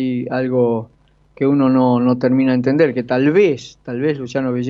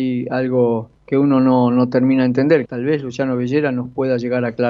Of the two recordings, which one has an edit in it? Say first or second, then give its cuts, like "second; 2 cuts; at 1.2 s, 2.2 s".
second; 2 cuts; at 1.0 s, 2.6 s